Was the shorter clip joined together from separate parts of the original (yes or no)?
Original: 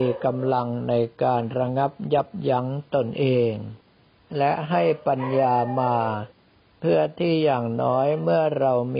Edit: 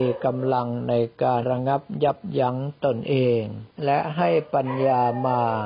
yes